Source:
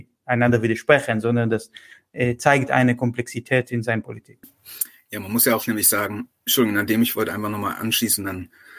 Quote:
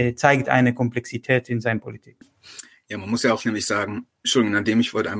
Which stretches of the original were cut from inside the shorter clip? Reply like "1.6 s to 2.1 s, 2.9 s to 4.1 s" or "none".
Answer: none